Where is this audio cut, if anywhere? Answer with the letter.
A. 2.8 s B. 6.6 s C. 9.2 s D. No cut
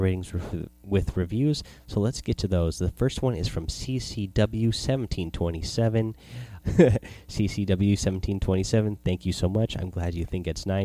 B